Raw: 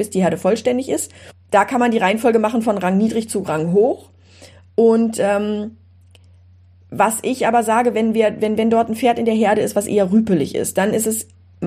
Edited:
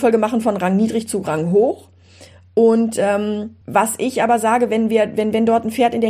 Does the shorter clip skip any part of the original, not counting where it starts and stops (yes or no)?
yes